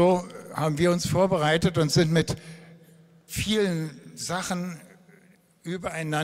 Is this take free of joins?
yes; 0 cuts

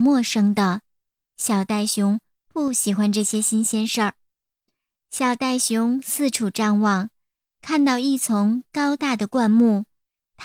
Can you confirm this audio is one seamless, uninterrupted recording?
yes; 0 cuts

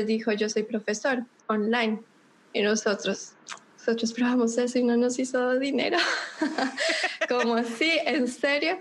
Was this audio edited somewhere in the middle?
no; 0 cuts

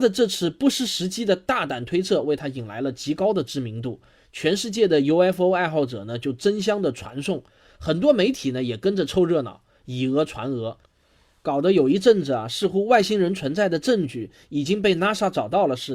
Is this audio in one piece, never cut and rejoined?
yes; 0 cuts

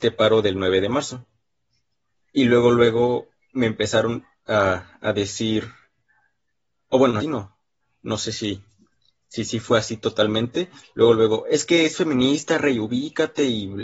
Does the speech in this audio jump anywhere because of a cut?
yes; 2 cuts; at 2.1 s, 7.2 s

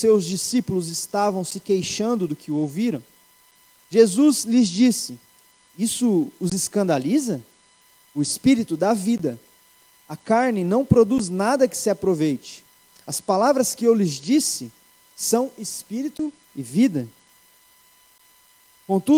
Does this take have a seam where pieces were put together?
yes; 1 cut; at 8.1 s

